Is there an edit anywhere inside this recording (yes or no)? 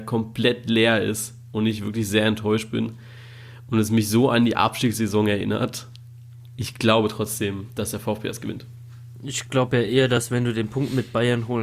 no